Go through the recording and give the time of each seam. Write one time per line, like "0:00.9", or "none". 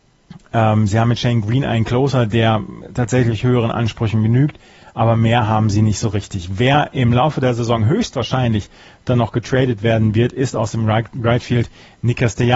none